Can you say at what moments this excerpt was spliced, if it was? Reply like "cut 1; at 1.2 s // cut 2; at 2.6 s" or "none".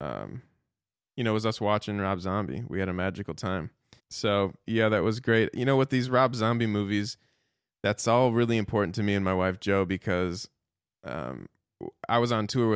cut 1; at 4.0 s